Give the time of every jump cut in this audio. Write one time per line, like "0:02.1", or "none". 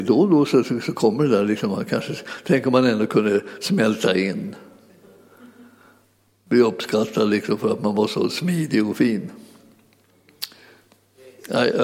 none